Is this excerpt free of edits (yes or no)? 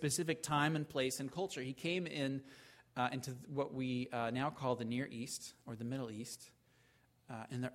yes